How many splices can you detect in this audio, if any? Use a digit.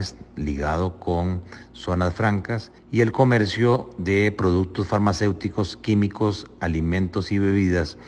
1